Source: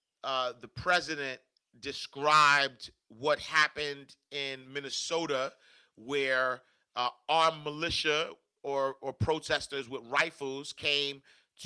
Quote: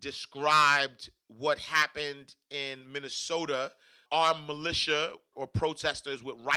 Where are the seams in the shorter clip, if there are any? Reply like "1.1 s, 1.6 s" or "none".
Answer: 4.1 s, 5.3 s